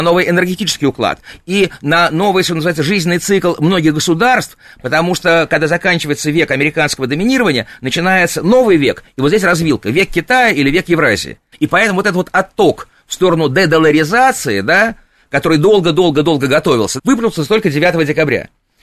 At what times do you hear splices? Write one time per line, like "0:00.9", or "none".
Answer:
0:11.5
0:17.0